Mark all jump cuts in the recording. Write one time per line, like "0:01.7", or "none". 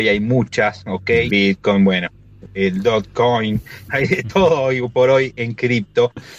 0:01.3
0:03.9